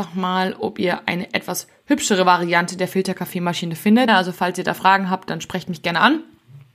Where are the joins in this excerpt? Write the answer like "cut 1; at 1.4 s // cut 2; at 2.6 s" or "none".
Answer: cut 1; at 4.1 s